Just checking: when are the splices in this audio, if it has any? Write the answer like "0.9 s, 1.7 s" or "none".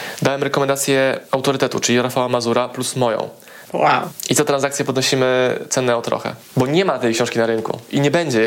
3.6 s